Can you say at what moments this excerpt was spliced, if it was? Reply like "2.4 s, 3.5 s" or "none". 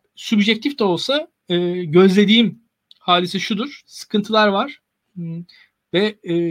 3.8 s

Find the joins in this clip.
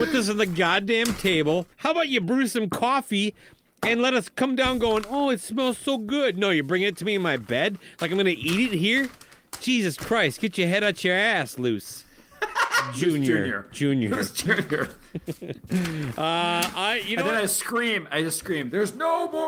none

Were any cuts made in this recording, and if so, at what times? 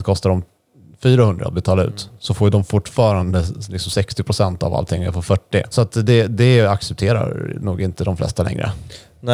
5.7 s

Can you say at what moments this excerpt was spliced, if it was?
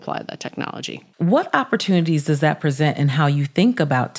1.1 s

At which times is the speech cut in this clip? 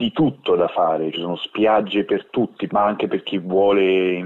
1.1 s, 2.7 s

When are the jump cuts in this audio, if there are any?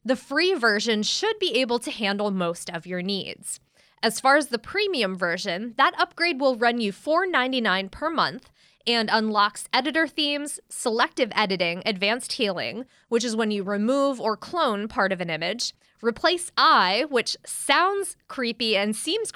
none

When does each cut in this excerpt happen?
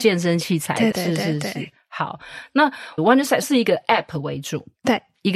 0.9 s

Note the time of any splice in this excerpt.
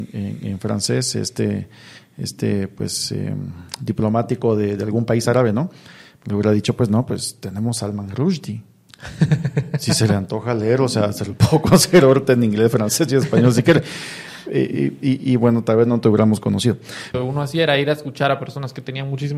17.1 s

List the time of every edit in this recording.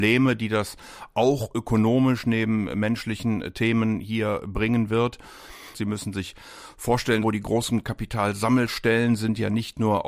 5.7 s, 7.2 s

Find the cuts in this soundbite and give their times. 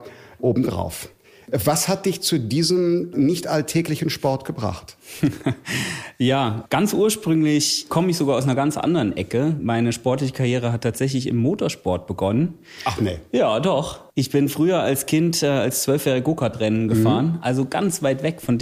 none

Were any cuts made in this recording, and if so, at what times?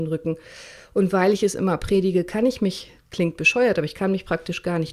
none

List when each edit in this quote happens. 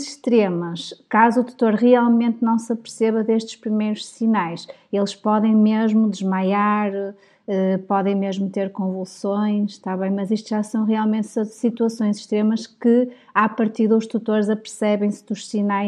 none

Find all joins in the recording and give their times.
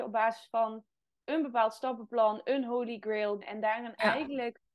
3.4 s

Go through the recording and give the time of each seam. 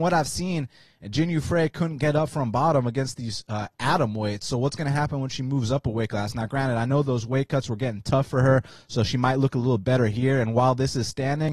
none

